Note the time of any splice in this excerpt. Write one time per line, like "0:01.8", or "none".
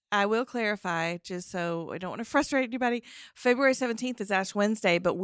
none